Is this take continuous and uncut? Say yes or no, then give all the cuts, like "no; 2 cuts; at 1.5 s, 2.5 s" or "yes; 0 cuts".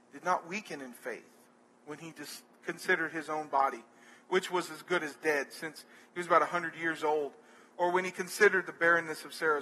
yes; 0 cuts